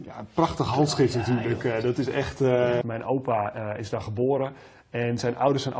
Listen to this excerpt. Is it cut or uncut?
cut